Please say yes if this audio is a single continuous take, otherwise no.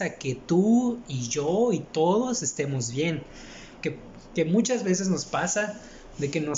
no